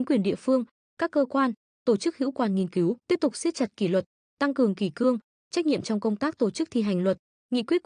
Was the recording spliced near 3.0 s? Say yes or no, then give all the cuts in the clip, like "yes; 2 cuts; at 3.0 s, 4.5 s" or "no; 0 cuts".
yes; 1 cut; at 3.0 s